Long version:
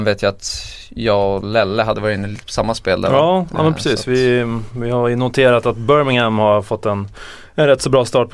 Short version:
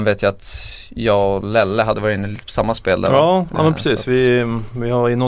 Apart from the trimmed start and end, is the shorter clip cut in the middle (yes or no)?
no